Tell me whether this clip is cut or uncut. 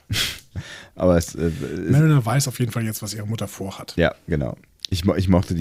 uncut